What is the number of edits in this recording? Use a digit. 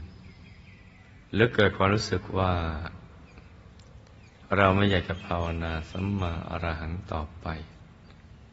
1